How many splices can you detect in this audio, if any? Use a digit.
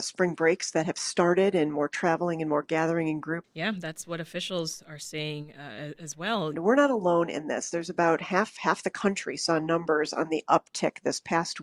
2